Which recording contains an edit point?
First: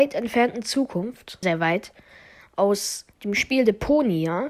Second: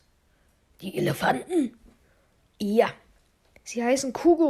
first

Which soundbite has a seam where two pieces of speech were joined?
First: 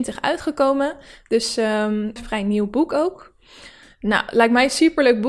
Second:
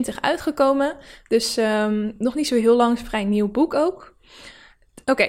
first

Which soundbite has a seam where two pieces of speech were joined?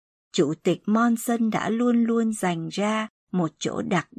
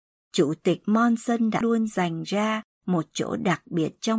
second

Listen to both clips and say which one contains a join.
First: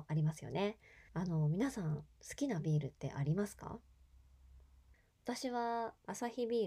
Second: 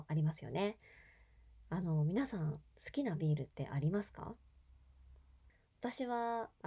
first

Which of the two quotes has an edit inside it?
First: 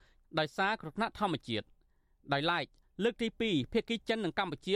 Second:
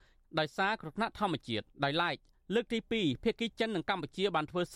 second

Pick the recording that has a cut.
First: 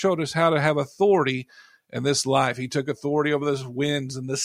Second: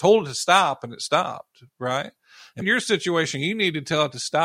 second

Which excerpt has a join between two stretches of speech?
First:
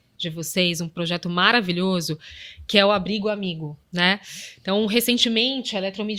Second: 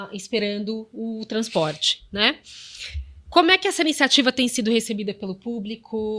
first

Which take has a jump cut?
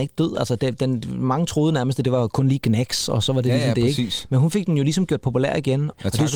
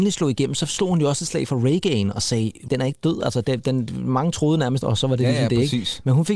second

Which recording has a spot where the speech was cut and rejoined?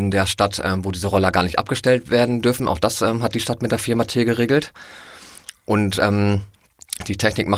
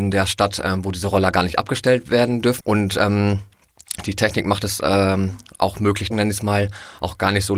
second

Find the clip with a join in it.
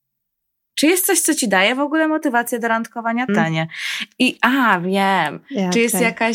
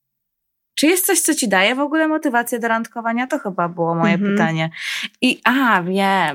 first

